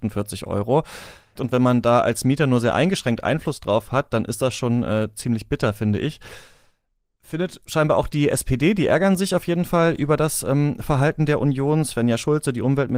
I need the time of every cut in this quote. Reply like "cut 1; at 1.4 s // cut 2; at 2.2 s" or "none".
cut 1; at 1.3 s